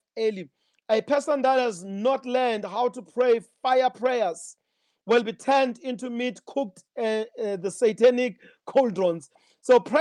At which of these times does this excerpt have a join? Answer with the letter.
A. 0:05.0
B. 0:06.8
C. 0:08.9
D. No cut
D